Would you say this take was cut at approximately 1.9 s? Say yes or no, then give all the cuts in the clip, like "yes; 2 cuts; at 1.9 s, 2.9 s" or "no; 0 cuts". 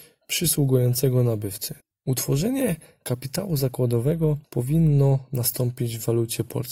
yes; 1 cut; at 1.9 s